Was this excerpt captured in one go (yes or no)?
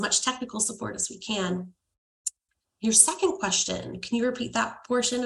yes